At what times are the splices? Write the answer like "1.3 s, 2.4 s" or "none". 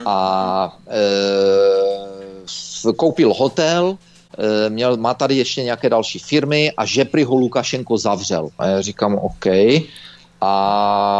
8.6 s

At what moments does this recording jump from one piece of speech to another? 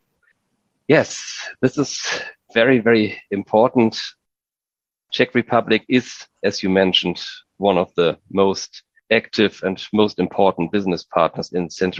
none

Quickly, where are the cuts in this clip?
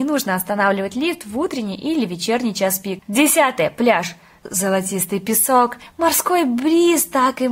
3.0 s, 5.9 s

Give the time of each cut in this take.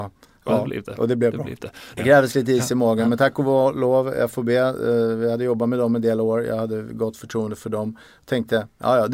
2.0 s

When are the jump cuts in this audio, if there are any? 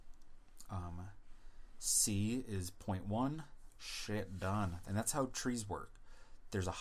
3.8 s, 4.8 s

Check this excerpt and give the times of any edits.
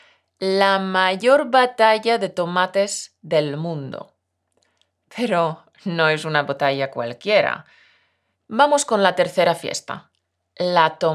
8.3 s

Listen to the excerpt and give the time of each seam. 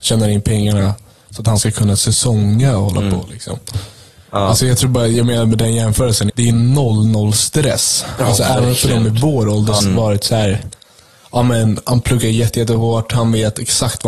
6.3 s, 9.8 s

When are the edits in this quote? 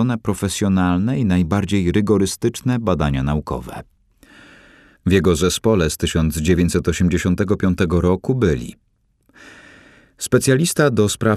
5.0 s

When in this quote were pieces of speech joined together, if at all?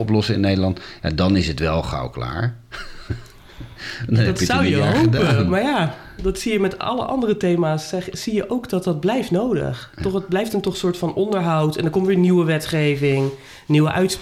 none

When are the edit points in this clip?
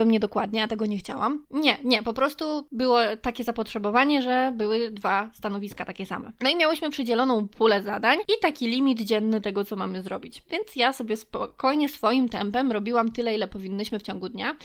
1.4 s

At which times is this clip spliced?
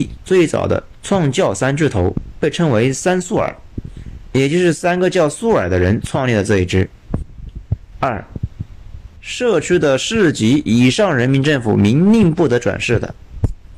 7.9 s

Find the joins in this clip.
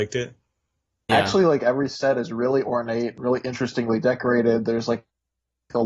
1.1 s

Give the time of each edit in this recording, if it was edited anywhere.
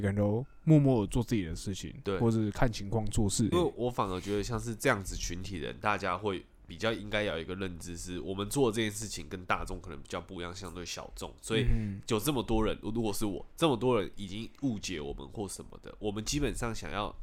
3.5 s

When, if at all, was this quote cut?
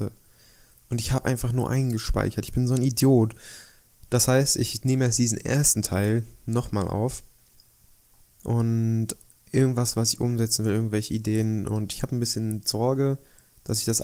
8.4 s

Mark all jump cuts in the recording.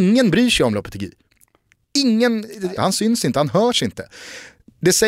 2.8 s

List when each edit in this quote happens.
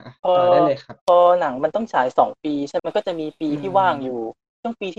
2.8 s

